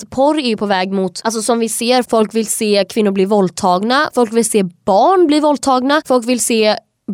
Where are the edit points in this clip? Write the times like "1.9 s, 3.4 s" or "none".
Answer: 2.0 s, 4.1 s